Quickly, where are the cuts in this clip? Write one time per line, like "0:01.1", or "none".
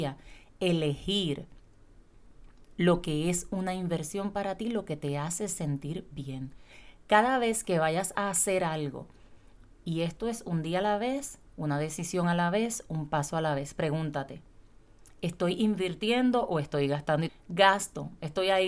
0:17.3